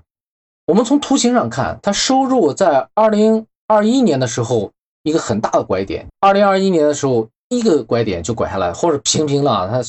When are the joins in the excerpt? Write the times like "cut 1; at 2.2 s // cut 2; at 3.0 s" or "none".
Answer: cut 1; at 6.1 s

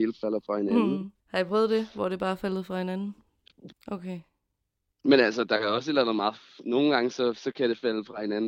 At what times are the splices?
cut 1; at 1.2 s // cut 2; at 3.7 s

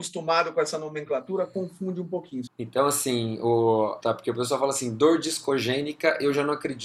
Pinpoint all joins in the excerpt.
cut 1; at 2.5 s // cut 2; at 4.0 s

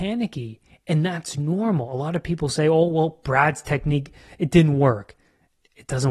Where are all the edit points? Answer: none

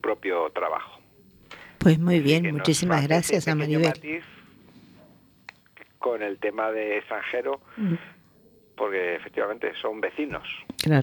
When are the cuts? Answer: none

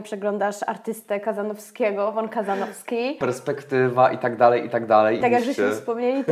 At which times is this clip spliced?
cut 1; at 3.2 s // cut 2; at 5.2 s

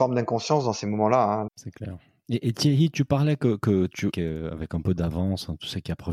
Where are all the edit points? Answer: cut 1; at 1.5 s // cut 2; at 4.1 s

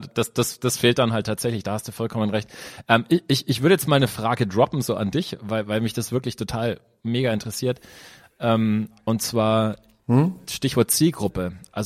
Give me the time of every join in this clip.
none

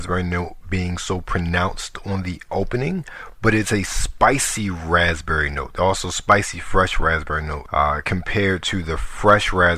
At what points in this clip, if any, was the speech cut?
none

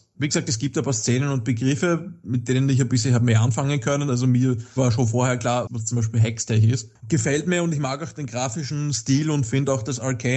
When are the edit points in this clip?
cut 1; at 5.7 s // cut 2; at 7.0 s

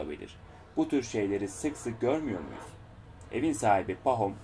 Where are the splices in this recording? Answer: none

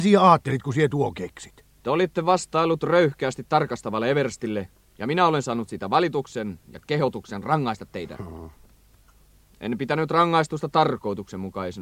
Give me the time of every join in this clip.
none

